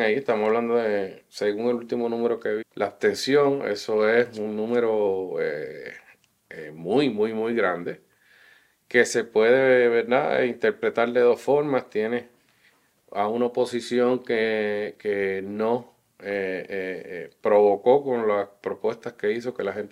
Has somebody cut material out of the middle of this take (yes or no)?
yes